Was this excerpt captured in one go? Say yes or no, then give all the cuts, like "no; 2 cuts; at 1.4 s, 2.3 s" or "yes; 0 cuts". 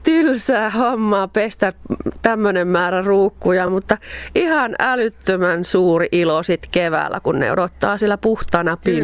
yes; 0 cuts